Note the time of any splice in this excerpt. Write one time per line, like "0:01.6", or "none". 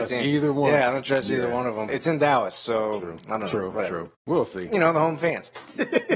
0:01.9